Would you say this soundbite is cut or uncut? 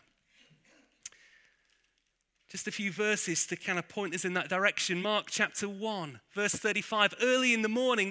uncut